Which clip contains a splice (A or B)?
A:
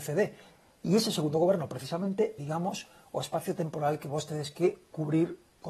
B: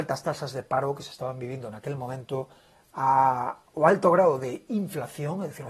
A